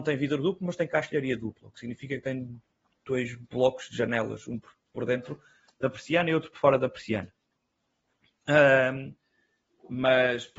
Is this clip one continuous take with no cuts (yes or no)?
yes